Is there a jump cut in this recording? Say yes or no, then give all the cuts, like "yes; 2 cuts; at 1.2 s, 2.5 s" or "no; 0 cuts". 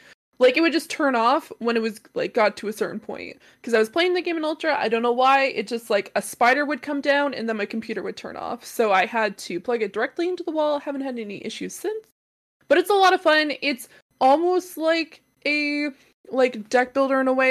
no; 0 cuts